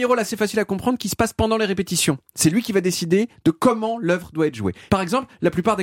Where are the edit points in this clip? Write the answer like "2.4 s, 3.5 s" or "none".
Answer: 4.9 s